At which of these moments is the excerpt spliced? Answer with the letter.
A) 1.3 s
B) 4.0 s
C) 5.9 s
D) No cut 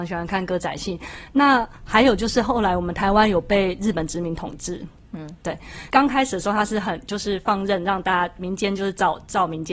C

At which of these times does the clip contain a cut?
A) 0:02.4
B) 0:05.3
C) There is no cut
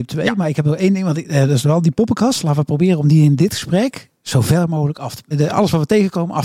B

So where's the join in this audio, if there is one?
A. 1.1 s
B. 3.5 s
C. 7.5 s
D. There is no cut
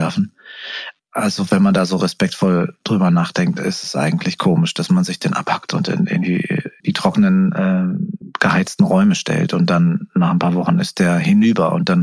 D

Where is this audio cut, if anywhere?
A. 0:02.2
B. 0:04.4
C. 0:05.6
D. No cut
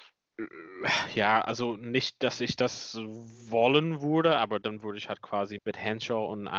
C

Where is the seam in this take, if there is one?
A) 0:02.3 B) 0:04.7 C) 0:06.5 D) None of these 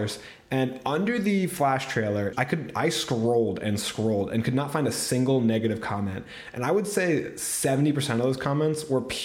A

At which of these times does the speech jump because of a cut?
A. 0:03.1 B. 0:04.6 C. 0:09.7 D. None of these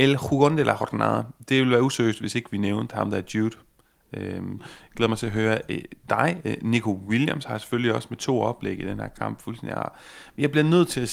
B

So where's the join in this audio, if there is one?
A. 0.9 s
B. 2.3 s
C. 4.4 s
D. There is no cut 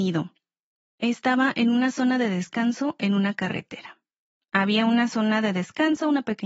C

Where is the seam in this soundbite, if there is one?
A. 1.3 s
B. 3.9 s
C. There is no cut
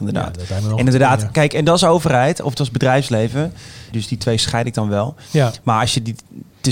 B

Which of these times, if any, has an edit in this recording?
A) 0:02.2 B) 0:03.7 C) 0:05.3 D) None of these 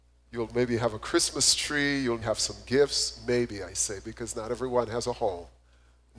A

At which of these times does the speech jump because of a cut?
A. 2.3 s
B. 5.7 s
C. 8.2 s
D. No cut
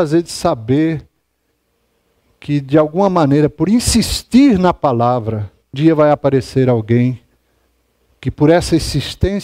B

